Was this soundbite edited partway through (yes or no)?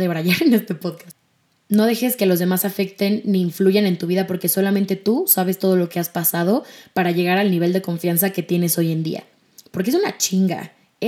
no